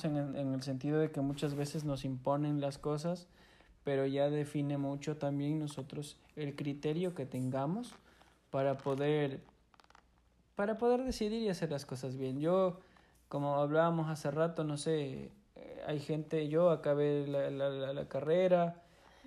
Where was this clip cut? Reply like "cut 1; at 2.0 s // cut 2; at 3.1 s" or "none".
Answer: none